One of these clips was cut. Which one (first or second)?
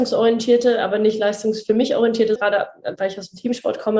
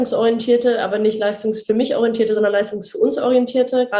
first